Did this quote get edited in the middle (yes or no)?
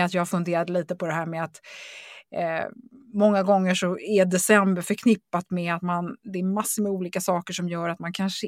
no